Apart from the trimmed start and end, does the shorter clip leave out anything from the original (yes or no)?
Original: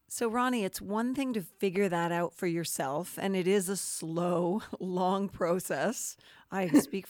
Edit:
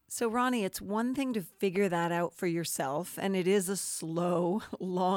no